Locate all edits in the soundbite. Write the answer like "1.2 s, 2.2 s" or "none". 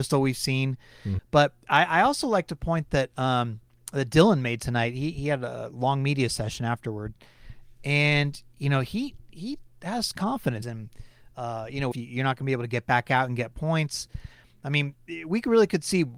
1.2 s, 10.6 s, 11.9 s